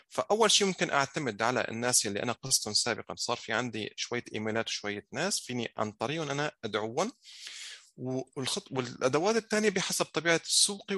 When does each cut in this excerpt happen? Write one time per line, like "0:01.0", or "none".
none